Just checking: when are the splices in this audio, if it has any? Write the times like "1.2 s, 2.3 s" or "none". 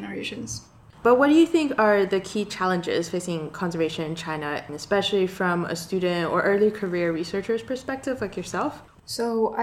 1.0 s